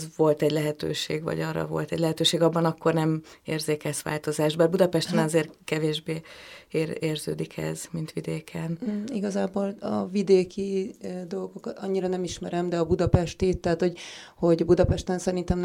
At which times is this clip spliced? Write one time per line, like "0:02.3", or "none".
none